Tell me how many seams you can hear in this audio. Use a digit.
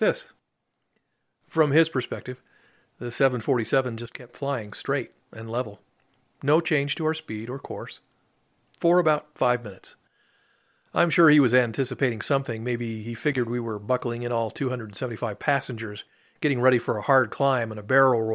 0